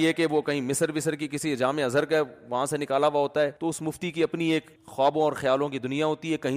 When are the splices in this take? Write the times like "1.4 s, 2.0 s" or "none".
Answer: 3.6 s, 4.8 s